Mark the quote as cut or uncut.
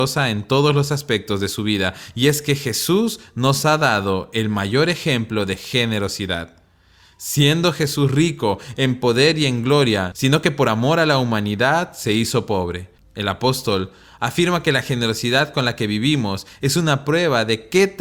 cut